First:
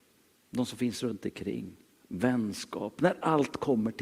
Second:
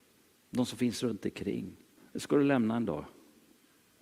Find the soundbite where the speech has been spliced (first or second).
second